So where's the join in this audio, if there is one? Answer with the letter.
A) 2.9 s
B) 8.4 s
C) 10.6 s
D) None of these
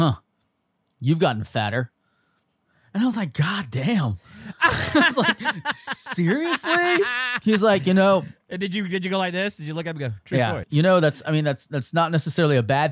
C